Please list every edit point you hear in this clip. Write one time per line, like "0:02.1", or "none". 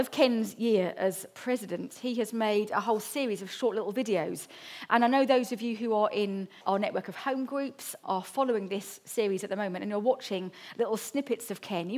0:06.6
0:08.0